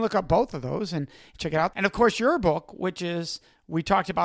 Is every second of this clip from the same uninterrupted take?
no; 1 cut; at 1.7 s

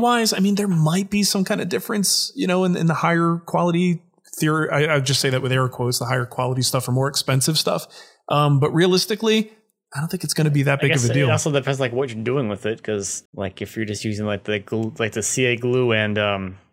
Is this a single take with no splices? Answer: no; 1 cut; at 13.3 s

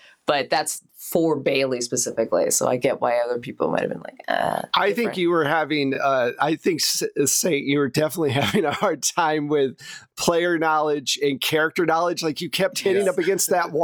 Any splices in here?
no; 0 cuts

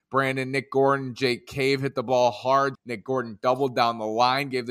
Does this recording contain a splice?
yes; 1 cut; at 2.7 s

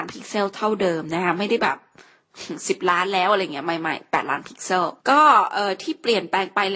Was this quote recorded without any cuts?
no; 1 cut; at 5.0 s

